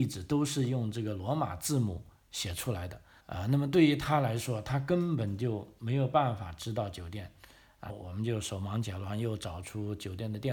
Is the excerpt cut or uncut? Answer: cut